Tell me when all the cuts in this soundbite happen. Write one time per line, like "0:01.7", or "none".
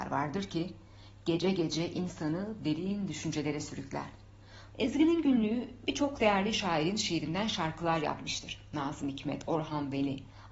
0:04.7